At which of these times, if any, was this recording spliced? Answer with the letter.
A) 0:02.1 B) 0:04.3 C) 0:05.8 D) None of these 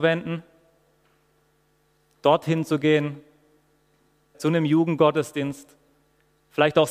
B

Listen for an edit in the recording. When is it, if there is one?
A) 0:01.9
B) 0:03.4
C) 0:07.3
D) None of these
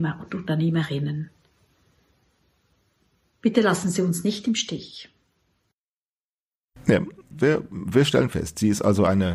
C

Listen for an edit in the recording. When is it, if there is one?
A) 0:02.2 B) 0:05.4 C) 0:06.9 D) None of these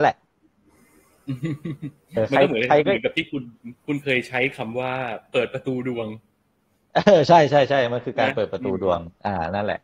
A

